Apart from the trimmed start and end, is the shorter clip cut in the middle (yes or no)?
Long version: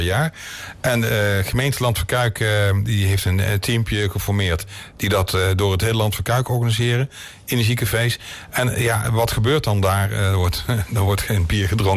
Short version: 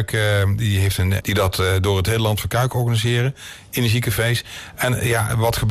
yes